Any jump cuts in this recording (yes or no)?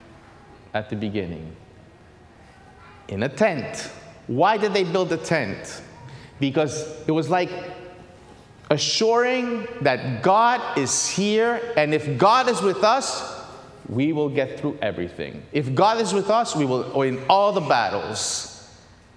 no